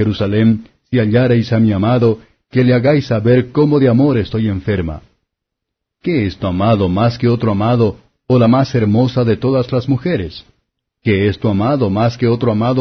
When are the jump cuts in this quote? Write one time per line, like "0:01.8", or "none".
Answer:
none